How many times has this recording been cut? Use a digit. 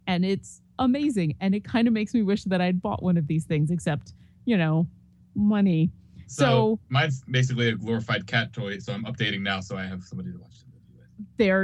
0